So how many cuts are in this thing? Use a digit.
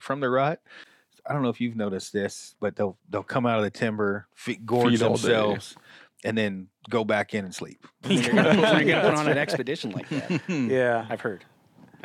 1